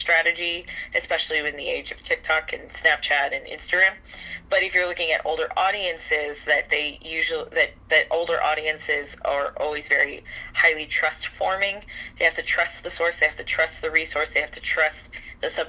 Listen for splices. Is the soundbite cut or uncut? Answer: uncut